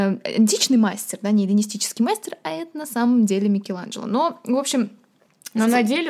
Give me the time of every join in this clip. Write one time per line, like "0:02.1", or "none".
none